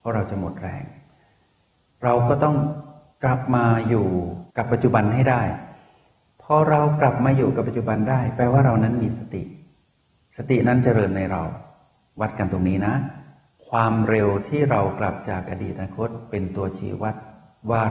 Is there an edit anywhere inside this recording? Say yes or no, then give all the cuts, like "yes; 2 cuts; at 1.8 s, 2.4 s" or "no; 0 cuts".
yes; 1 cut; at 4.5 s